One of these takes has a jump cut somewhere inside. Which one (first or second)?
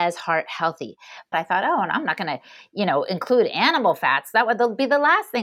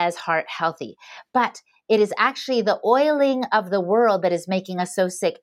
first